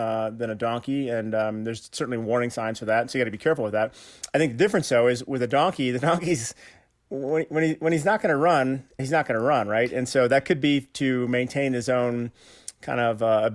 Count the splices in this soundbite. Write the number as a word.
one